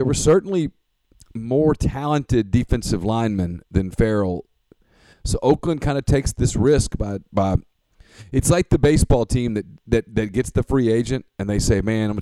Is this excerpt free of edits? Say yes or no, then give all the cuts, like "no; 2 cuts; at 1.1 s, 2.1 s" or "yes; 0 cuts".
yes; 0 cuts